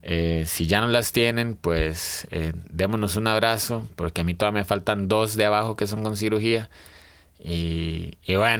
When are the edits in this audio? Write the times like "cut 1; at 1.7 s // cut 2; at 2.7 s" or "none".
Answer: none